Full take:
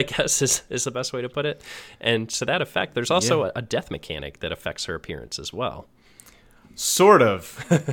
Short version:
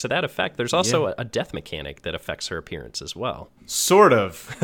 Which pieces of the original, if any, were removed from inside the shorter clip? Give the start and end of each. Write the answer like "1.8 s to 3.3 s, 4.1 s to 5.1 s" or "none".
5.9 s to 6.7 s